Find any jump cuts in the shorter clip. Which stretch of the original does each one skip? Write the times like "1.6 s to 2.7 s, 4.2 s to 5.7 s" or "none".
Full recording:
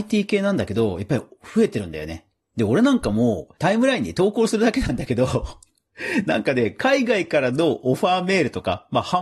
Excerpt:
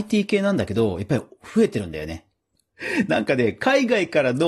2.6 s to 5.7 s